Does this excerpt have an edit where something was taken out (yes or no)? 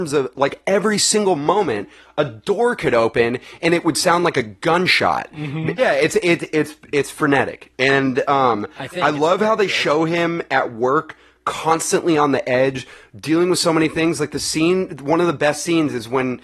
yes